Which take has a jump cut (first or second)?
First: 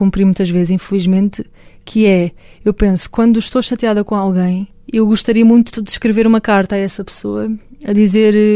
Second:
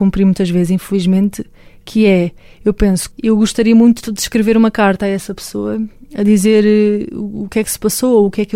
second